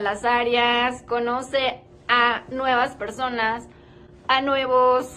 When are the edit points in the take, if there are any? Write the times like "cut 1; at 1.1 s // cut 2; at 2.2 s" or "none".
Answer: none